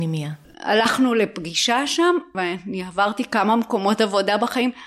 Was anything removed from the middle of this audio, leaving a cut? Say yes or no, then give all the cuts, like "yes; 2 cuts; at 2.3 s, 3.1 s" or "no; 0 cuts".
yes; 1 cut; at 2.3 s